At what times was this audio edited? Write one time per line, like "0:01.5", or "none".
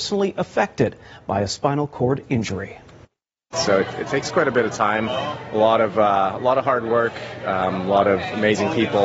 0:03.5